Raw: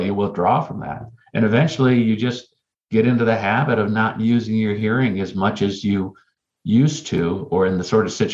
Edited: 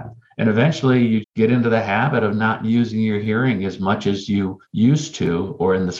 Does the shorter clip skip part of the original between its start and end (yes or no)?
yes